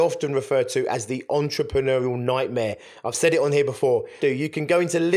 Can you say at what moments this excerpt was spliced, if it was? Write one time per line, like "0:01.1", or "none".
0:04.2